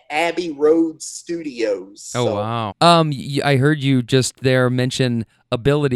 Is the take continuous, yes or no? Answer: no